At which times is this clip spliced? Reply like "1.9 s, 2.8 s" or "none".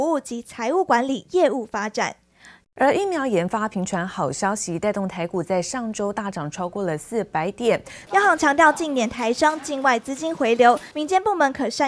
2.6 s, 8.1 s, 10.9 s